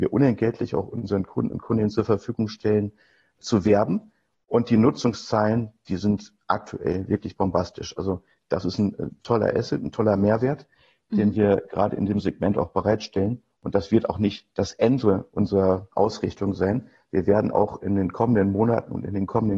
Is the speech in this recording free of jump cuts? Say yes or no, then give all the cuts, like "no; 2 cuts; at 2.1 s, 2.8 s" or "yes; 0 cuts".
yes; 0 cuts